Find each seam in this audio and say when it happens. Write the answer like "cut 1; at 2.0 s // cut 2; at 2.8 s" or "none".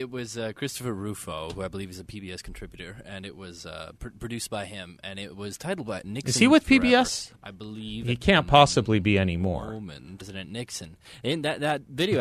cut 1; at 10.2 s